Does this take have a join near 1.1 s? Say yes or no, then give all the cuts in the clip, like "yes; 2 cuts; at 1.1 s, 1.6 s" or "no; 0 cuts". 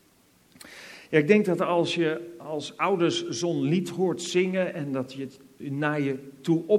no; 0 cuts